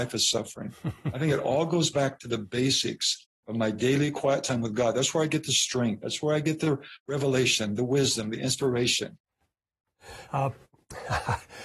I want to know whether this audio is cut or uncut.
uncut